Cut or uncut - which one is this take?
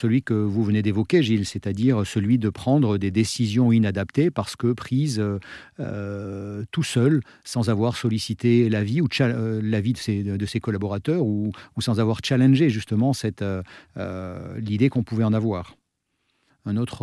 uncut